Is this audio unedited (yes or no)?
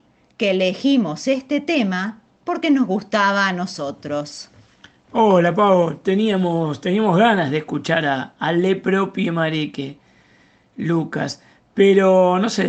yes